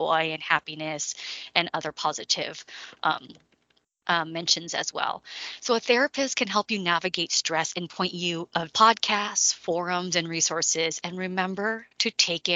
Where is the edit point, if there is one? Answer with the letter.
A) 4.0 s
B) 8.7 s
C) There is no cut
B